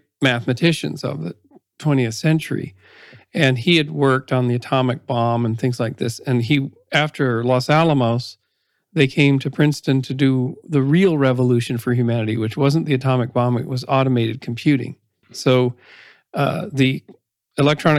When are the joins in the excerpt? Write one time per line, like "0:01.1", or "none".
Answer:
0:15.2